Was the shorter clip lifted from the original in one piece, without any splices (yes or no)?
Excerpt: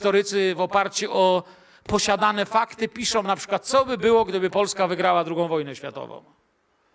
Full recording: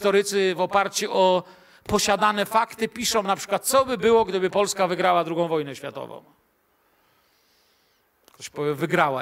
yes